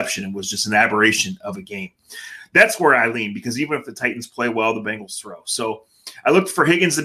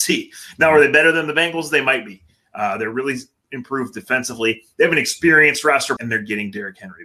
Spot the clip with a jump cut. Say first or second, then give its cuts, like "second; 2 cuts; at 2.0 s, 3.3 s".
second; 1 cut; at 6.0 s